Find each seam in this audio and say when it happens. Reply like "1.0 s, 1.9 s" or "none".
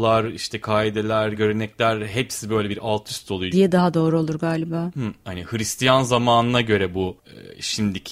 1.3 s, 3.5 s, 5.2 s